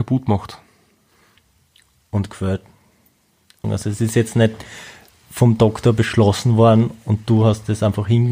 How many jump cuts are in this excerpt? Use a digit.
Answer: 1